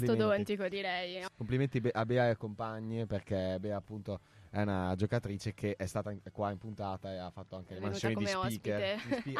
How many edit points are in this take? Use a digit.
1